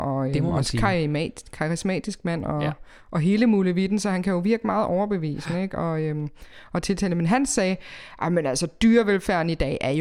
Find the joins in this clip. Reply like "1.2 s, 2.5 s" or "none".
none